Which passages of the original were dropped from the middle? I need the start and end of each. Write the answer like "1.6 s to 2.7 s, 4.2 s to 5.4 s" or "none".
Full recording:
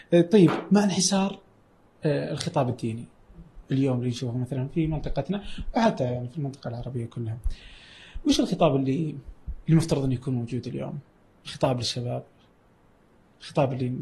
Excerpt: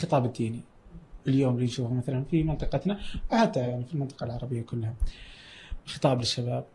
8.2 s to 11.4 s